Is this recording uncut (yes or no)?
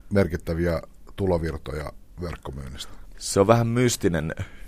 no